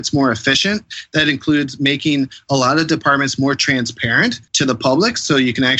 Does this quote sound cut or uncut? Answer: cut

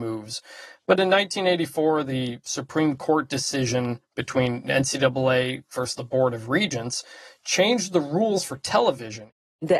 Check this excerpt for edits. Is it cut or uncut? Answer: uncut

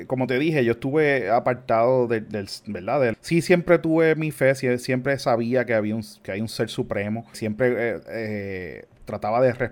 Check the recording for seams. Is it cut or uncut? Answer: cut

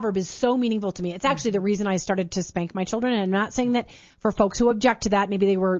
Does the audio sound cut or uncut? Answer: uncut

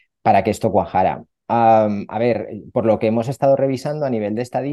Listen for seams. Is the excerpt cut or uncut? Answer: uncut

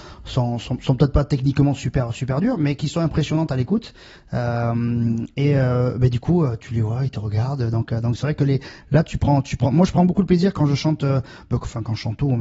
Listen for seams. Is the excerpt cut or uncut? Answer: uncut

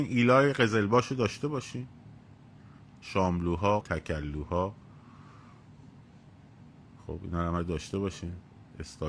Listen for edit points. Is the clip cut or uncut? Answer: cut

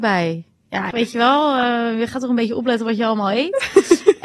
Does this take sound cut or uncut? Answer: cut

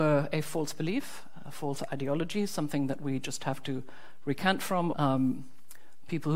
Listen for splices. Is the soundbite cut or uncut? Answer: cut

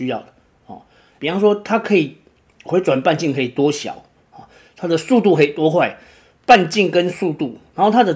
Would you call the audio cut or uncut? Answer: cut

